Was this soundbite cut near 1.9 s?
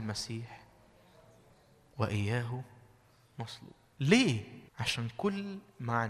no; 1 cut; at 4.7 s

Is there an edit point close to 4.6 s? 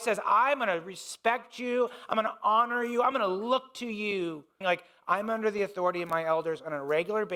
yes; 1 cut; at 4.6 s

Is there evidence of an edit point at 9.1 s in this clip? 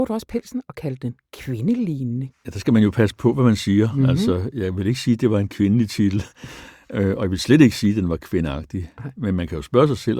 no; 1 cut; at 2.3 s

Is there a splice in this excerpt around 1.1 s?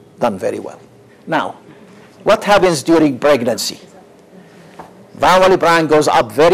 yes; 1 cut; at 1.1 s

